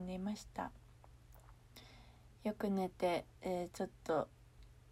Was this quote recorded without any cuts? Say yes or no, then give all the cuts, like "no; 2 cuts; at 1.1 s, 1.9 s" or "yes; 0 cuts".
no; 1 cut; at 3.3 s